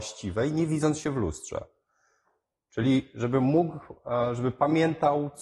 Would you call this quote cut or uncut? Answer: uncut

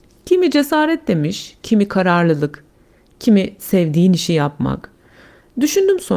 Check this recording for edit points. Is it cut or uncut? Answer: cut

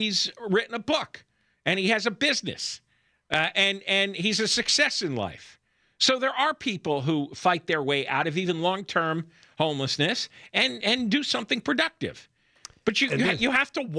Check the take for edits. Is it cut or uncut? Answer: cut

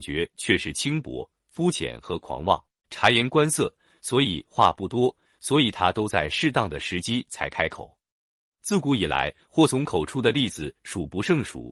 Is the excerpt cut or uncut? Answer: cut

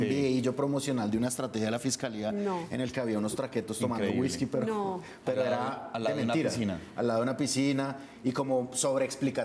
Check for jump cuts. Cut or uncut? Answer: uncut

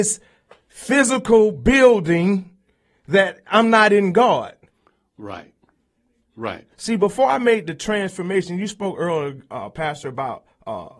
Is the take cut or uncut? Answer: uncut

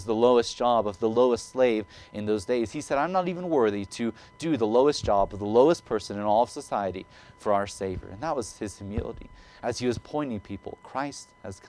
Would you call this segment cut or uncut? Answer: uncut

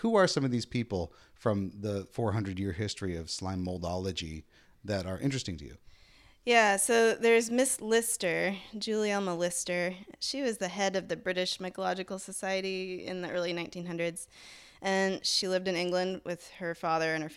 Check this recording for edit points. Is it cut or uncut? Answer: uncut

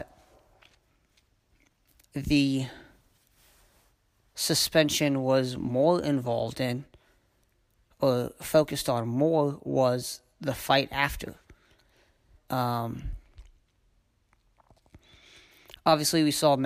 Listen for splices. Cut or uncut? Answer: cut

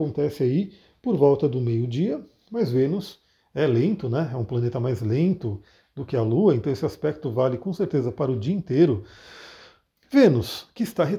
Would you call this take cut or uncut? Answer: uncut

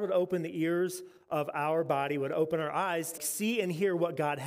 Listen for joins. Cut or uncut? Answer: cut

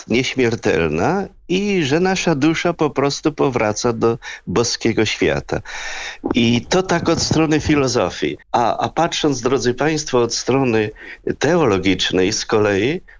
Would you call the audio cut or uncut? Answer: cut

